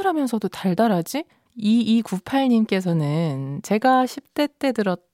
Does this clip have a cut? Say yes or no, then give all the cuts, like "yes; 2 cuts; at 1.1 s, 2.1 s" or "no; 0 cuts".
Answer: yes; 1 cut; at 1.5 s